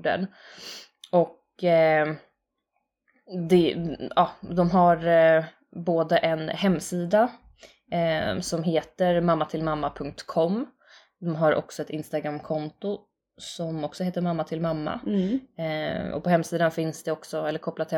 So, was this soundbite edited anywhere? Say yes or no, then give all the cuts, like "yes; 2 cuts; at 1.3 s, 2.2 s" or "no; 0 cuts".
no; 0 cuts